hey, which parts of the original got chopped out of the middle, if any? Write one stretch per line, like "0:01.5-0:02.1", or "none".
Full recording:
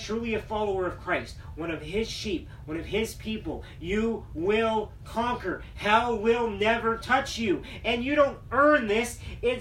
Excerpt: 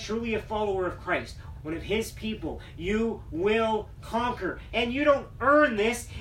0:01.5-0:02.6
0:05.7-0:07.8